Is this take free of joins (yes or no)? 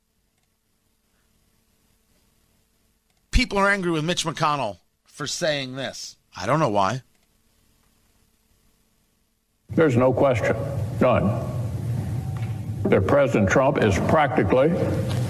no